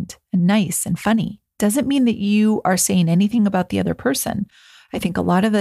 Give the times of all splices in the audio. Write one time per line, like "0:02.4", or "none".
none